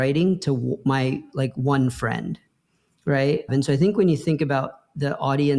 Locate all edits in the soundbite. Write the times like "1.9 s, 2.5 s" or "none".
3.5 s